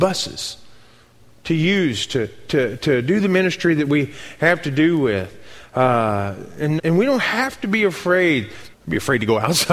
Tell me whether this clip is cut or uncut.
cut